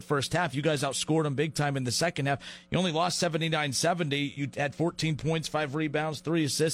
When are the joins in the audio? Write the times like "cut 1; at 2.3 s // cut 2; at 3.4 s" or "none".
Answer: cut 1; at 4.4 s